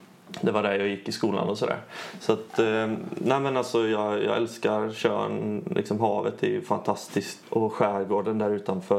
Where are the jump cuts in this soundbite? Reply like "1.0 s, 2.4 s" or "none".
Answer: 7.4 s